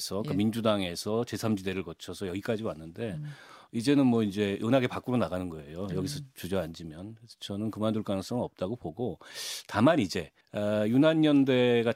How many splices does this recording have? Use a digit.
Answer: 1